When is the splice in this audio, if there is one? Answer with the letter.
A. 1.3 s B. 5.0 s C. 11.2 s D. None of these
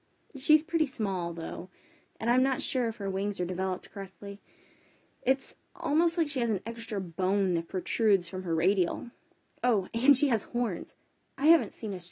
D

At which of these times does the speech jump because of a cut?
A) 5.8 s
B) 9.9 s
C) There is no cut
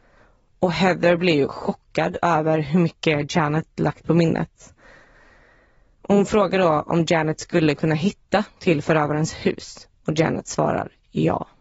B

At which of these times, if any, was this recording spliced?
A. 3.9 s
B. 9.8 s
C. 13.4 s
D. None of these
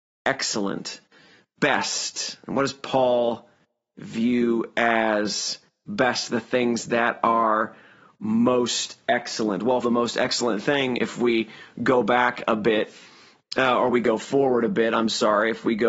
B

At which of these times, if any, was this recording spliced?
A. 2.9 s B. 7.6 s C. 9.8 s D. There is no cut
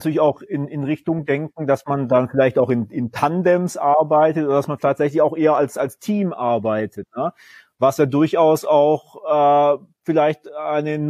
D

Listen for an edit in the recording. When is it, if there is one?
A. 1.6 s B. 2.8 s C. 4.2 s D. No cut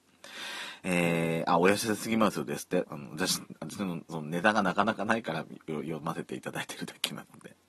B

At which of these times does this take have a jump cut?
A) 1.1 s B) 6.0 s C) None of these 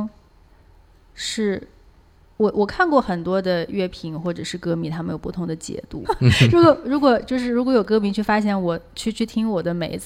B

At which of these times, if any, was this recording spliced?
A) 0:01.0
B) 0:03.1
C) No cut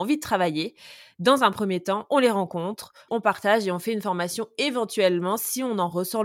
B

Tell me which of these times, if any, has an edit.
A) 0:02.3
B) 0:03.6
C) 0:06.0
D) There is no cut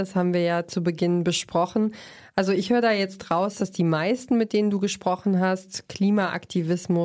D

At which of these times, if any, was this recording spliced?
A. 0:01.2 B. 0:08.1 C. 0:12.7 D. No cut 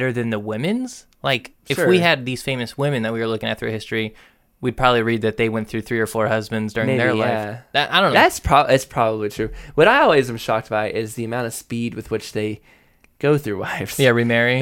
B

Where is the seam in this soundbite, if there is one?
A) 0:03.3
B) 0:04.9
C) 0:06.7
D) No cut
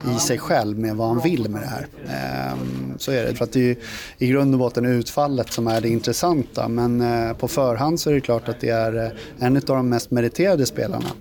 A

